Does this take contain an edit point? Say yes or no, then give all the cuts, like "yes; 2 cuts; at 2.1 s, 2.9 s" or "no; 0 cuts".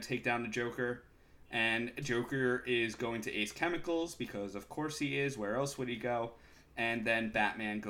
no; 0 cuts